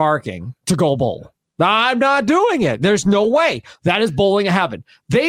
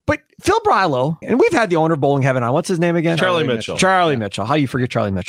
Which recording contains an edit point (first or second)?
second